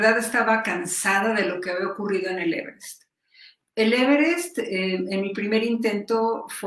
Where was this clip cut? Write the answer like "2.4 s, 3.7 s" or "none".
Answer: none

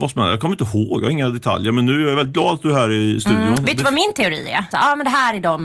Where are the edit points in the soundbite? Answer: 4.7 s

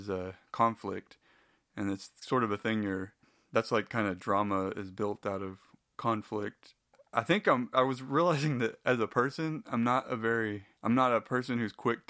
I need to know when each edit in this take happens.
7.7 s, 10.8 s

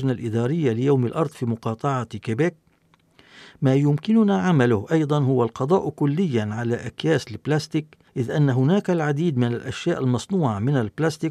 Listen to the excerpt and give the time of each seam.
8.1 s

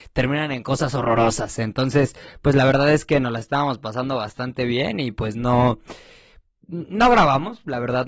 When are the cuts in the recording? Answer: none

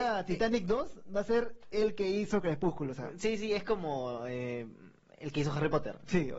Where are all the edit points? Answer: none

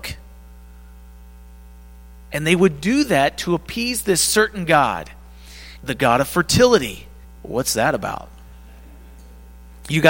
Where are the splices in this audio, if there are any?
5.8 s, 7.2 s

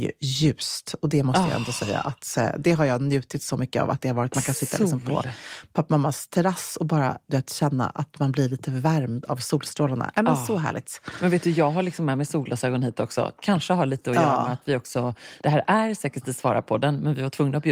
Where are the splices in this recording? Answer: none

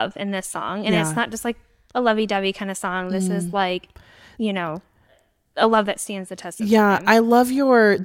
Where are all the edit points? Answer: none

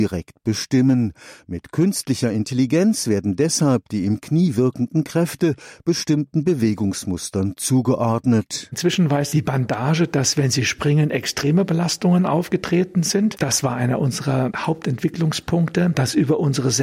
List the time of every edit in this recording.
none

